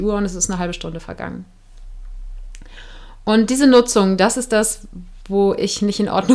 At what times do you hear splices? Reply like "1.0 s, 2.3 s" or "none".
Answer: none